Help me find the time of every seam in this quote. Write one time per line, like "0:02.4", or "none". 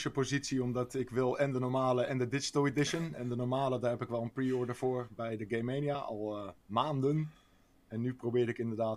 none